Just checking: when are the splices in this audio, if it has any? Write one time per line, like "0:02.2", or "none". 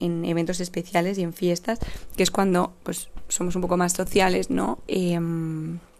0:04.9